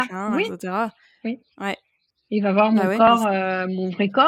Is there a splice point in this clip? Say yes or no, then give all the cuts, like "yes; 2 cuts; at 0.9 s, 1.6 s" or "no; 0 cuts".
no; 0 cuts